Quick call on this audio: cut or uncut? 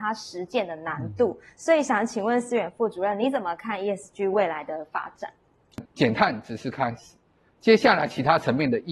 cut